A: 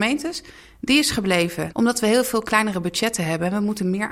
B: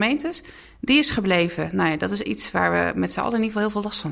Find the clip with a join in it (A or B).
A